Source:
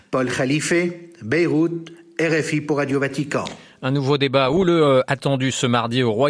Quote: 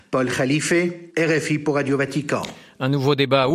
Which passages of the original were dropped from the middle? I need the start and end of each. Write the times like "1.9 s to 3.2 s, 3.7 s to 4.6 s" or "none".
1.1 s to 2.1 s